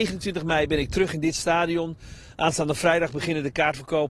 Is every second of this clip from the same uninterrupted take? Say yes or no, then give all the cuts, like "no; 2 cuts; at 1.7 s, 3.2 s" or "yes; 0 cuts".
yes; 0 cuts